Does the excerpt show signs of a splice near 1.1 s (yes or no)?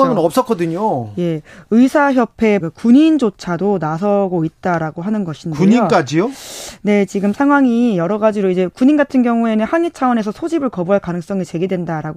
no